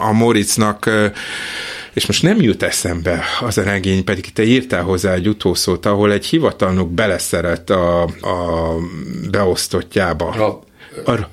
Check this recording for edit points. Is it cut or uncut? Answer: cut